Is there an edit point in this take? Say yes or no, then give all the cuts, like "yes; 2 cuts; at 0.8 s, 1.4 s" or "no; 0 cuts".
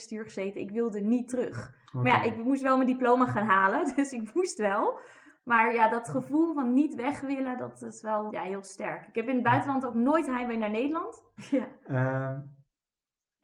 yes; 2 cuts; at 8.3 s, 11.4 s